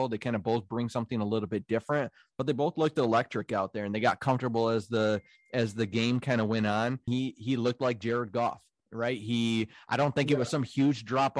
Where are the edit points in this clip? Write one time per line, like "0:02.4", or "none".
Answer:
0:07.1

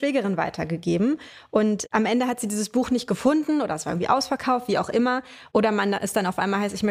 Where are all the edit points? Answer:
0:05.5

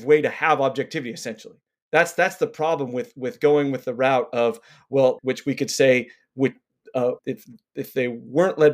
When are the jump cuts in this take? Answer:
0:05.2
0:07.2

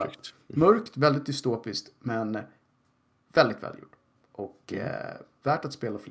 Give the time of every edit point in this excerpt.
none

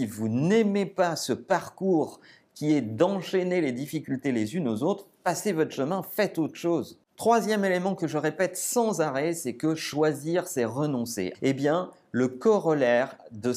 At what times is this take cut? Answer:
0:11.3

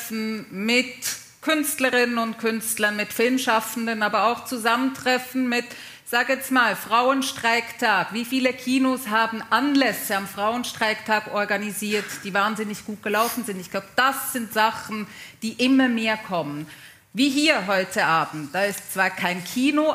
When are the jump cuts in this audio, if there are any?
none

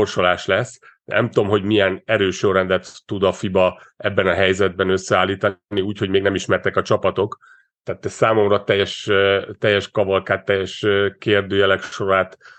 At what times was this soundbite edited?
none

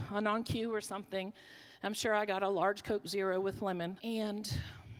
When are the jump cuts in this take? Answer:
0:04.0

